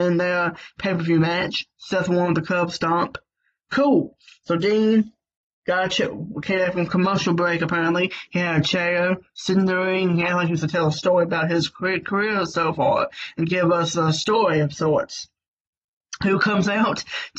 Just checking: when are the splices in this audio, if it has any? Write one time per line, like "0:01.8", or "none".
none